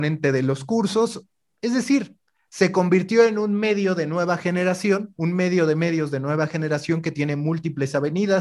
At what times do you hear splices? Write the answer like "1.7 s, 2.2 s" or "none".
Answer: none